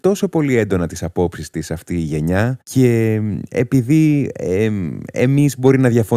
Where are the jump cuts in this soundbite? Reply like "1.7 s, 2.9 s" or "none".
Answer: 2.6 s

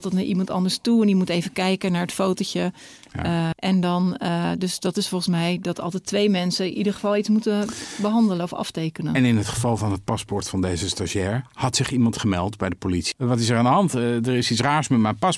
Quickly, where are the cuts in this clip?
3.5 s, 13.1 s

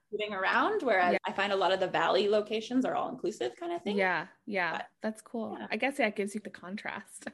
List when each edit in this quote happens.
1.2 s, 6.4 s

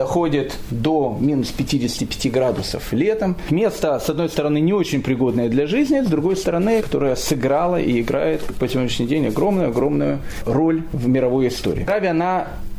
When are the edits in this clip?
6.8 s

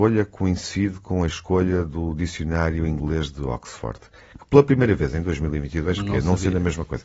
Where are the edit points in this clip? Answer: 6.0 s

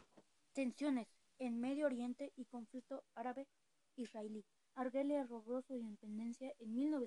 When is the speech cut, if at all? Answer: 4.6 s

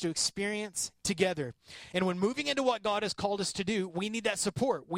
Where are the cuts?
none

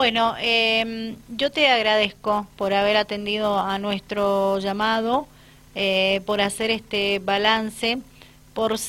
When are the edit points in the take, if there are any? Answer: none

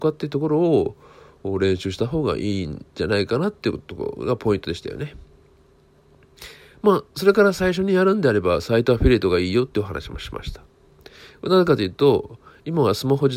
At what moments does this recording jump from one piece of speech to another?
none

